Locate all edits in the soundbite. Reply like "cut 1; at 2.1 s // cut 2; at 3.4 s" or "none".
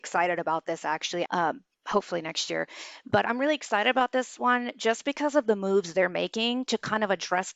cut 1; at 1.3 s

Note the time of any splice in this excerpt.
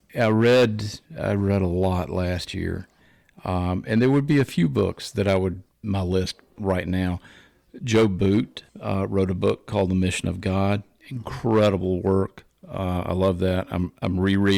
cut 1; at 5.7 s // cut 2; at 8.7 s

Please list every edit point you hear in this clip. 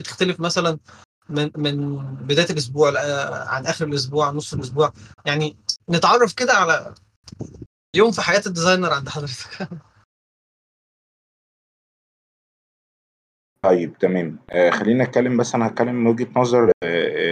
none

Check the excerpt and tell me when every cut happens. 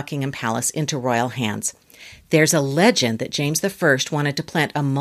none

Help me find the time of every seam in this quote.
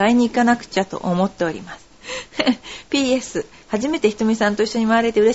cut 1; at 1.9 s

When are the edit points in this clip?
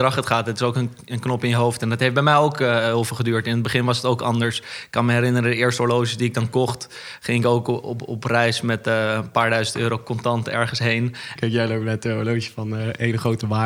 cut 1; at 11.4 s

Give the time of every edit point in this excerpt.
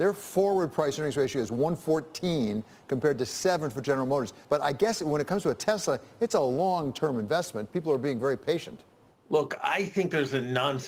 cut 1; at 4.4 s

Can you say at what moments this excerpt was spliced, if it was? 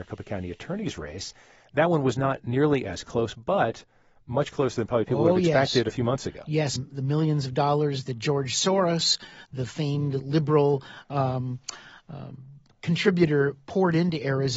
cut 1; at 6.8 s

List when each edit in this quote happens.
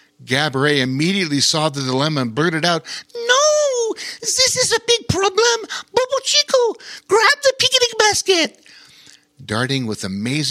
none

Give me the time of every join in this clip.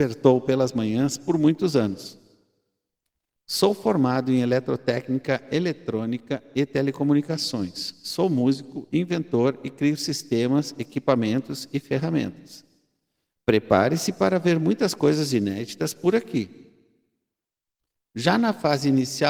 none

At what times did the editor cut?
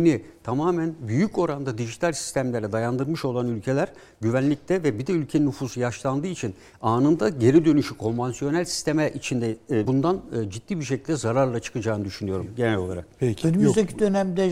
cut 1; at 9.9 s

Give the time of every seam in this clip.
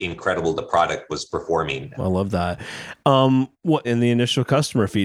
cut 1; at 2.0 s // cut 2; at 3.8 s

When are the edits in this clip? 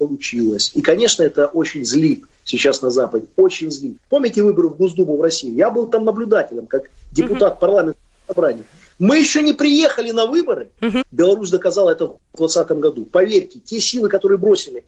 cut 1; at 4.0 s // cut 2; at 11.0 s

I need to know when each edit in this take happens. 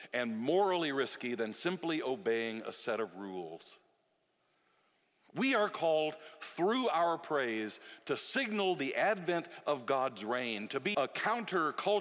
cut 1; at 10.9 s

